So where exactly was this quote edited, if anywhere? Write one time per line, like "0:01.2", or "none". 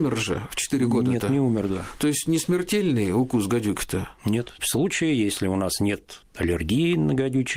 0:04.6